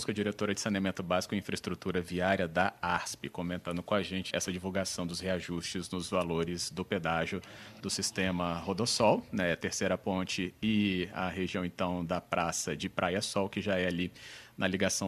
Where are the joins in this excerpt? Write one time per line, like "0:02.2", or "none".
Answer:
0:04.3

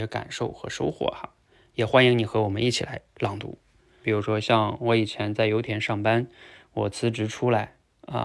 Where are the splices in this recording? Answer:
0:04.0

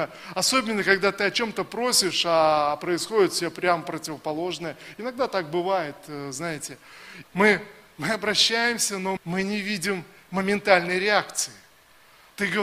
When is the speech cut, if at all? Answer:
0:07.2
0:09.2

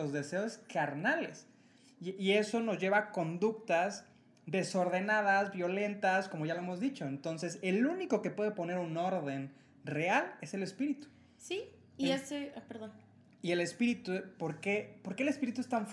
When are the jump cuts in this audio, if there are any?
none

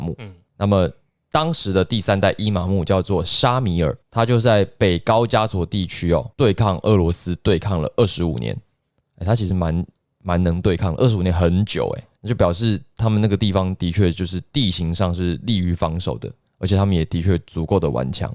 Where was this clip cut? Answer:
none

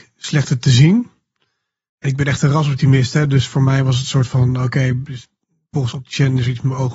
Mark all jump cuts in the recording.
none

